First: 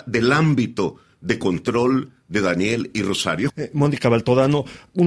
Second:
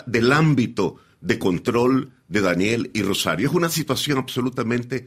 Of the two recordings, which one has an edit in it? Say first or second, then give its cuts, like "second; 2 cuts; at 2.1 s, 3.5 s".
first; 1 cut; at 3.5 s